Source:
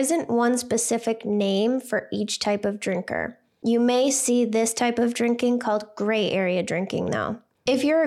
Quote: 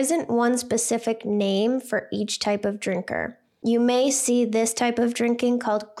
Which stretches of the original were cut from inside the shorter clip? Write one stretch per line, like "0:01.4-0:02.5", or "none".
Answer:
none

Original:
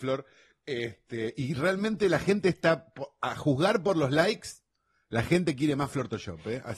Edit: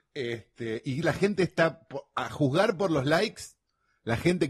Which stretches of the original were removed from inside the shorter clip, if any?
0:01.5-0:02.1

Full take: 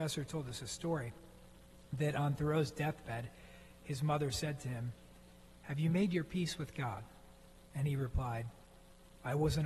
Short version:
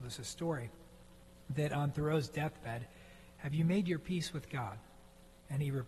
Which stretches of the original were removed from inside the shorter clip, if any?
0:03.8-0:05.6

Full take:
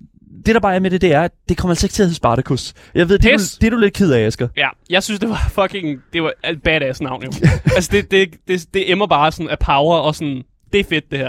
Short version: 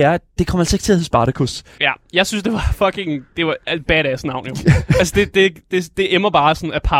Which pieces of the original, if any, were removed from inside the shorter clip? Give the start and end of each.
0:02.9-0:04.5

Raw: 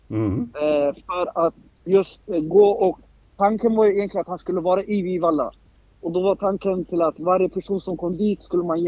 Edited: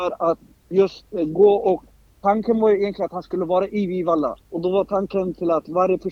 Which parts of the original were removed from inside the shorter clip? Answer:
0:05.6-0:05.9

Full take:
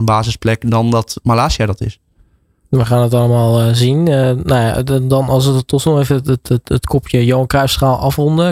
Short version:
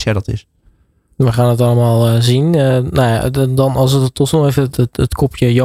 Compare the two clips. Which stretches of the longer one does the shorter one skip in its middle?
0:06.2-0:06.4

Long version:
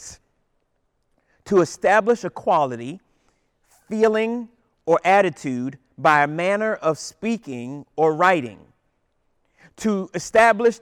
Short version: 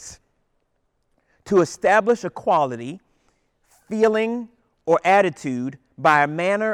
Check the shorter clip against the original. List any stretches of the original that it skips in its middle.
none

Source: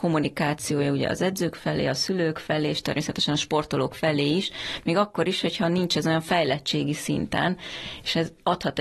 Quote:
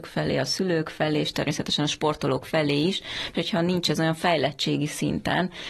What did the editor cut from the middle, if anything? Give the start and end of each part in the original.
0:04.8-0:05.4

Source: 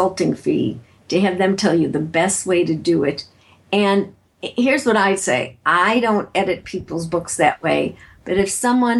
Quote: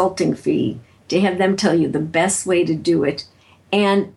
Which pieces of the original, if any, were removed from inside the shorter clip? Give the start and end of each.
none

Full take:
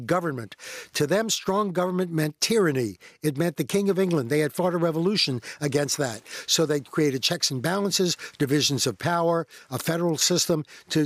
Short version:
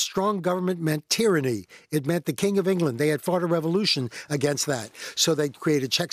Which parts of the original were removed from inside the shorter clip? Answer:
none

